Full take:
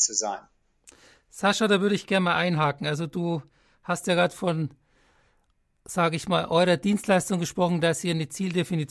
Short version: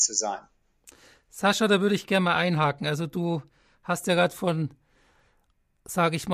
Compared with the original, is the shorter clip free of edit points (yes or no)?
yes